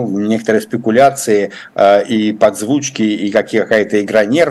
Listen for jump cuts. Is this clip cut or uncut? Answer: uncut